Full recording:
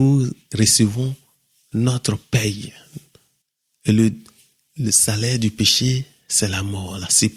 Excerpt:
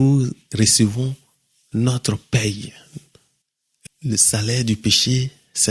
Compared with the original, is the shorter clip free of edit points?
no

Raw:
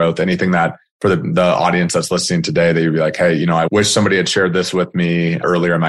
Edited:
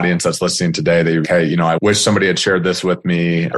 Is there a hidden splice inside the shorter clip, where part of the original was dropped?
yes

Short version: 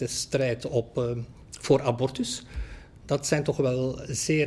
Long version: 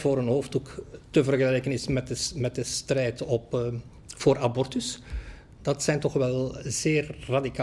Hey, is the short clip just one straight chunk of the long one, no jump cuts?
yes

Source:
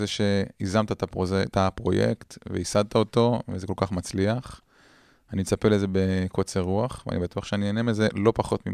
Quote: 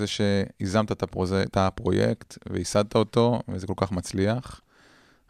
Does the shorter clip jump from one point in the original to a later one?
no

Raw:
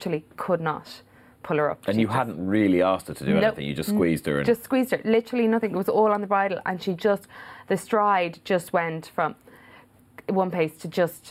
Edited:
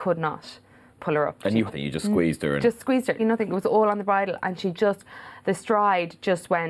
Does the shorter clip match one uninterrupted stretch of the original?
no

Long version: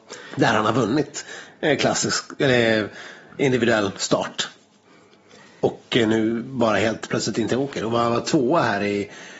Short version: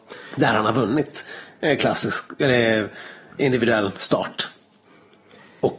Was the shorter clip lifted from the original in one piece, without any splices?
yes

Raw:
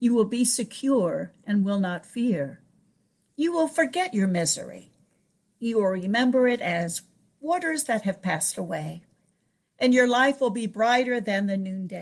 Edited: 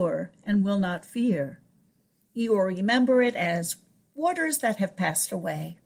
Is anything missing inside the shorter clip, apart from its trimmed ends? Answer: yes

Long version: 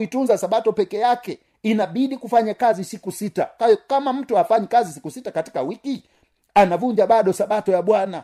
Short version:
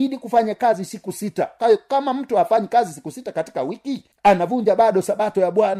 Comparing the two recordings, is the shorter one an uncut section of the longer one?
no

